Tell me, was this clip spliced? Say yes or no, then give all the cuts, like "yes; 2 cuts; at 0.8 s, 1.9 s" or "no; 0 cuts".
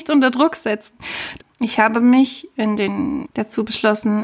yes; 2 cuts; at 1.4 s, 3.2 s